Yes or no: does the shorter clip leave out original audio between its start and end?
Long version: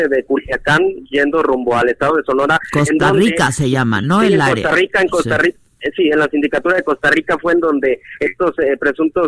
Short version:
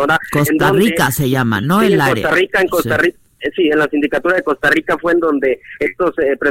no